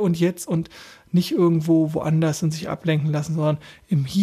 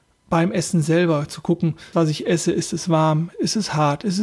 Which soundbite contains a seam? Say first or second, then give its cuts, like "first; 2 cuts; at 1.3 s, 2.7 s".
second; 2 cuts; at 1.9 s, 3.3 s